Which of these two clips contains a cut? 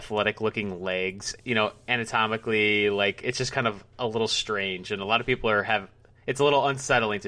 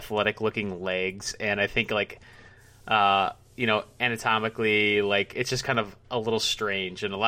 first; 1 cut; at 1.4 s

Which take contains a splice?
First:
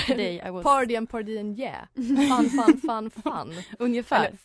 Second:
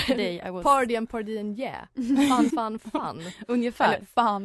second; 1 cut; at 2.5 s

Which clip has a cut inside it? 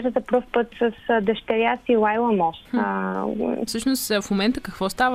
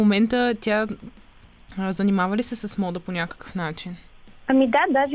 first; 2 cuts; at 2.7 s, 3.7 s

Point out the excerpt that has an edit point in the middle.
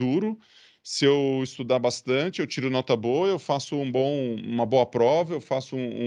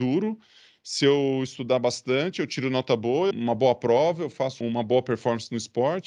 second; 2 cuts; at 3.3 s, 4.6 s

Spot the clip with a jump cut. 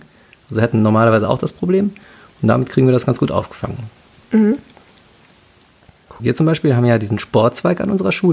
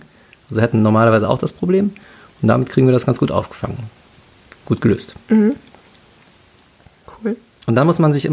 first; 2 cuts; at 4.2 s, 6.2 s

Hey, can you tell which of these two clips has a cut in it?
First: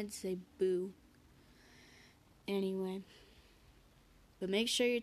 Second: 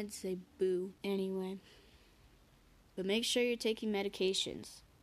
second; 1 cut; at 1.0 s

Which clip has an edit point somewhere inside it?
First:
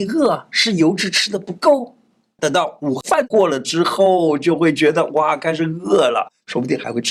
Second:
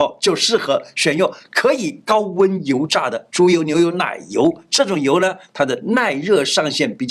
first; 1 cut; at 2.4 s

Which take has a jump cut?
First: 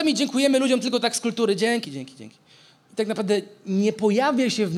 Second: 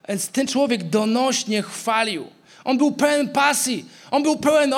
first; 1 cut; at 1.8 s

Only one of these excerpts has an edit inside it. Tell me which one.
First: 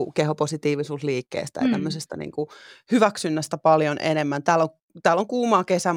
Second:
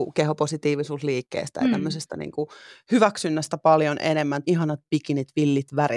second; 1 cut; at 4.4 s

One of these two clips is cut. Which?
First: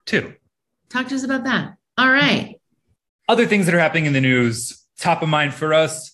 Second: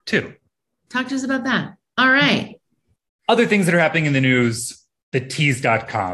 first; 1 cut; at 4.9 s

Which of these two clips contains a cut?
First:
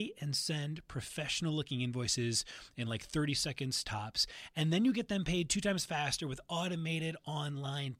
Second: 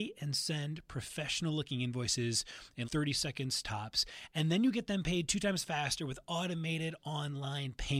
second; 1 cut; at 2.8 s

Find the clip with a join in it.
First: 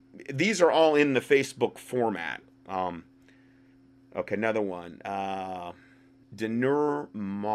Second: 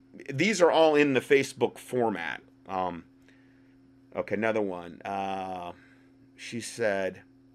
first; 1 cut; at 6.2 s

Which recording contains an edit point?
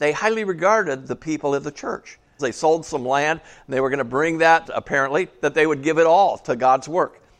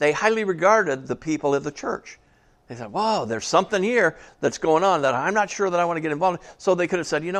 first; 2 cuts; at 2.4 s, 4.6 s

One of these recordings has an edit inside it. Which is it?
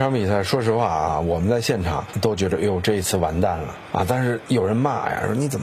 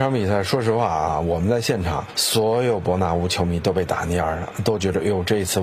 first; 1 cut; at 2.1 s

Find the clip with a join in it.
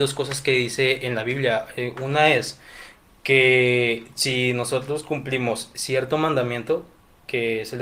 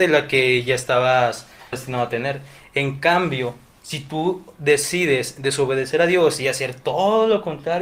second; 1 cut; at 1.7 s

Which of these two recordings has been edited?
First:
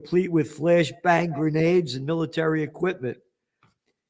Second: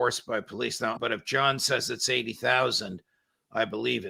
second; 1 cut; at 1.0 s

